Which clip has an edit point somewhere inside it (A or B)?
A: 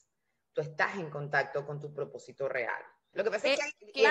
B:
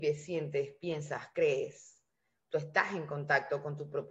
A